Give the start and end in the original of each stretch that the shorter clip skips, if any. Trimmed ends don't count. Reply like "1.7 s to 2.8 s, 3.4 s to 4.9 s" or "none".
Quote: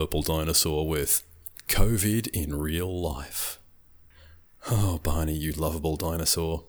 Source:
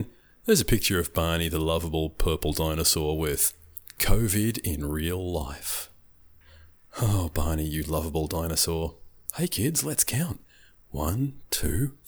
none